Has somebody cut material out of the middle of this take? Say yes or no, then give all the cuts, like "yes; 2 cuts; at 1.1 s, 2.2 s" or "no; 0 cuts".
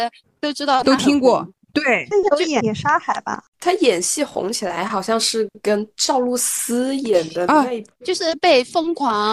no; 0 cuts